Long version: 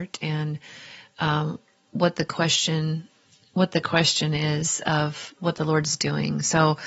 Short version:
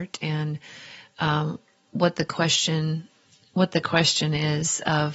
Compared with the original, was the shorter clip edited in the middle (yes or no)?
no